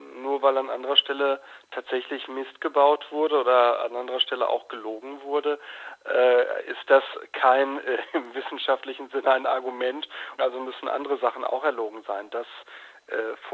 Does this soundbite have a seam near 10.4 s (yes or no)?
yes